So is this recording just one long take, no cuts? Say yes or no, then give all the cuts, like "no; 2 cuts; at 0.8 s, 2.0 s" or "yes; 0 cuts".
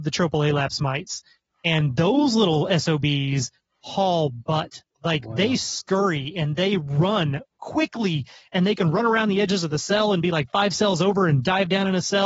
yes; 0 cuts